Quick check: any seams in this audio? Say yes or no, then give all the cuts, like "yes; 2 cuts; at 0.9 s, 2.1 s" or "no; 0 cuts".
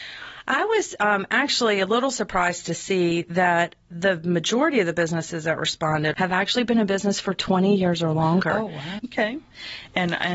yes; 2 cuts; at 6.1 s, 9.0 s